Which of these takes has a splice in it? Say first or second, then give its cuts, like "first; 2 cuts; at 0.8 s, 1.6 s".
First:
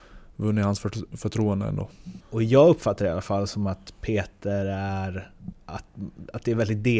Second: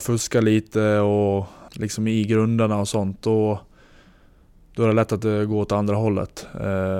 first; 2 cuts; at 2.2 s, 5.5 s